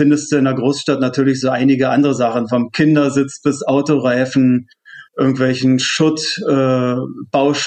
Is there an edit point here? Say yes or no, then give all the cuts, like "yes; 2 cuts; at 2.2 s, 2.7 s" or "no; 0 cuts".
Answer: no; 0 cuts